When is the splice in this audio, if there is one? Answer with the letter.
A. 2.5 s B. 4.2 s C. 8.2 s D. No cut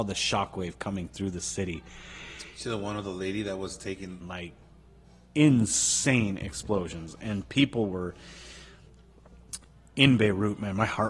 B